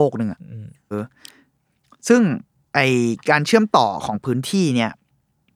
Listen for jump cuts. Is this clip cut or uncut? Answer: cut